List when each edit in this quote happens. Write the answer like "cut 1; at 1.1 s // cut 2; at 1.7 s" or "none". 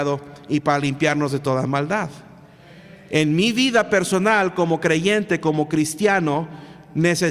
none